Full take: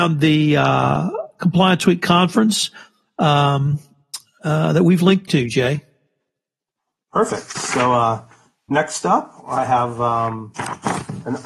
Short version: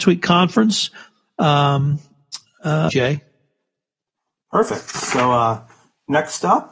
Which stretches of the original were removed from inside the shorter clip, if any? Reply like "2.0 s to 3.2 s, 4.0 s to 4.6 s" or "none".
4.7 s to 5.5 s